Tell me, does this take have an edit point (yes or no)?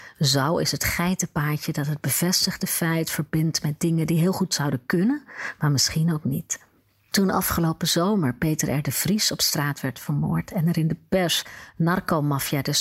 no